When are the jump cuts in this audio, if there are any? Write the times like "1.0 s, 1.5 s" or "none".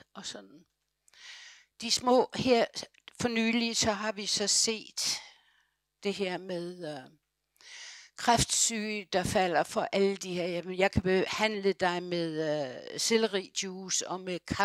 none

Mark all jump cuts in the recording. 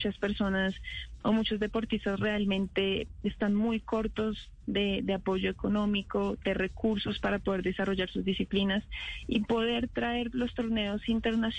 none

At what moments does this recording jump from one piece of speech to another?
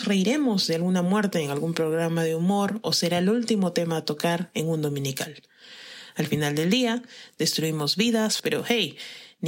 8.4 s

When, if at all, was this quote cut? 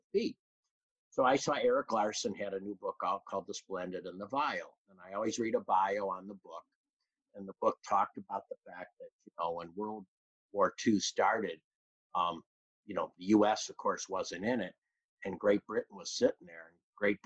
none

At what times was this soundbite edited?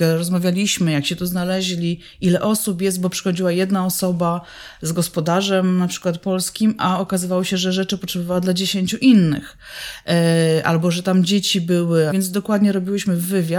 12.1 s

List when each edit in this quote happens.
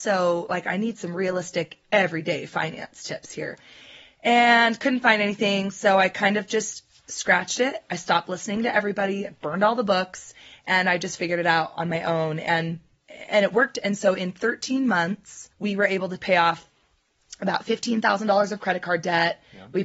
15.5 s

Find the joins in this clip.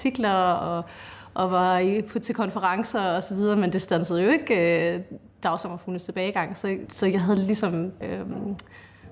6.9 s, 8.0 s

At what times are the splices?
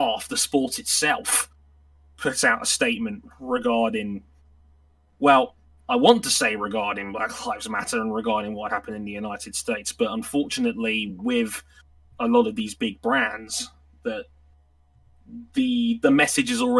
none

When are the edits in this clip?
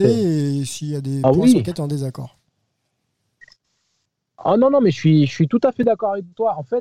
none

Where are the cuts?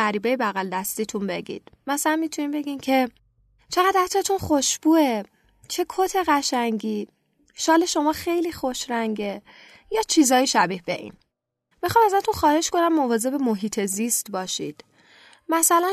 11.7 s

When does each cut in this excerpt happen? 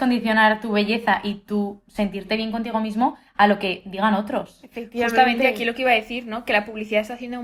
none

